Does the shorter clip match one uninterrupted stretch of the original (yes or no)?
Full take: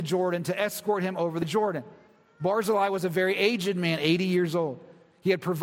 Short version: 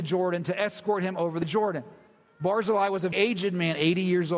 no